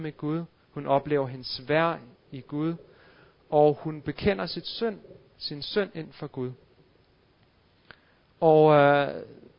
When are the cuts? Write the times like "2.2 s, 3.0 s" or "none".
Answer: none